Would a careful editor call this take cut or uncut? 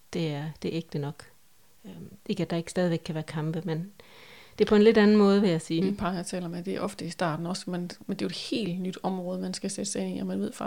cut